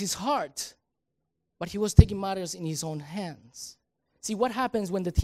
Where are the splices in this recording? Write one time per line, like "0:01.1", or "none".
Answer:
none